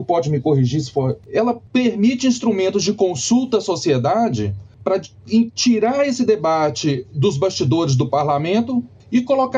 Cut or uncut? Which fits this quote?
cut